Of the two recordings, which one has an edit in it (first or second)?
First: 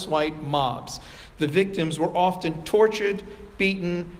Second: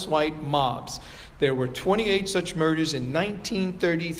first